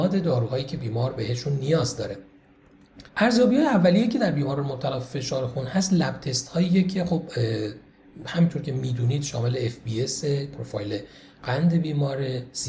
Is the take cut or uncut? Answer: cut